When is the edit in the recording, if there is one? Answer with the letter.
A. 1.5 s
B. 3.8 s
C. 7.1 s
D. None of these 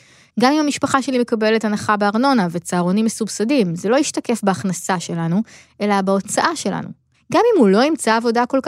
C